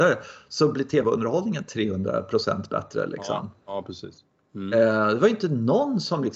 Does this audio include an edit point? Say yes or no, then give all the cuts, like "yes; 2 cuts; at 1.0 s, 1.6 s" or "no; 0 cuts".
no; 0 cuts